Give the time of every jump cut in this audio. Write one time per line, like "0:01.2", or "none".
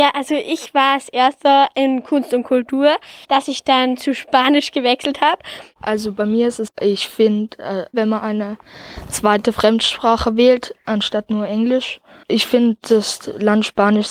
0:03.2
0:06.7
0:07.9